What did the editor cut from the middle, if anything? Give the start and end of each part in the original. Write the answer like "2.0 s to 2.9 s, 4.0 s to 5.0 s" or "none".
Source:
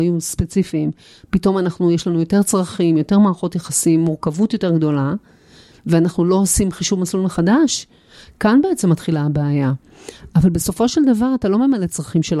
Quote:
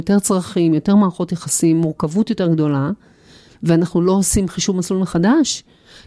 none